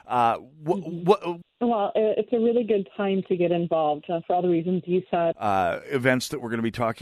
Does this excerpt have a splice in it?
yes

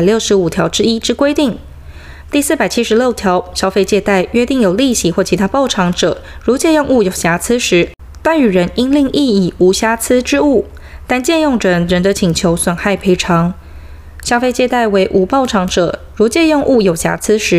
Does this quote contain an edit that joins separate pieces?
no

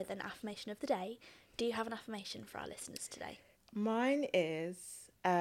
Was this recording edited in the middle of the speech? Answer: yes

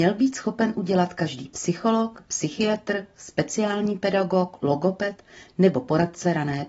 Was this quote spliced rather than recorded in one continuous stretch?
no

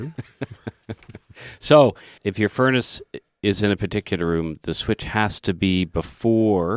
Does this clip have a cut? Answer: yes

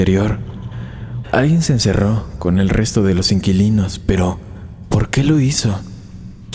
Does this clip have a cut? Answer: yes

